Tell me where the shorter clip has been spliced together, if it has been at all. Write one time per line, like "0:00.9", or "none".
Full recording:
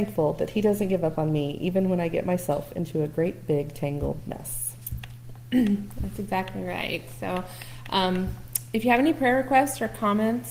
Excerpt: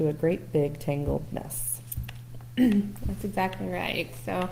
none